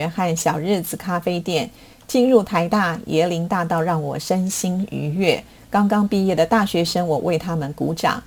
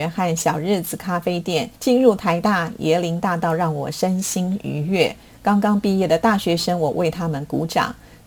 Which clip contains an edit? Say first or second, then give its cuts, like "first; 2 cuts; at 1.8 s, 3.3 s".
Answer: second; 1 cut; at 1.8 s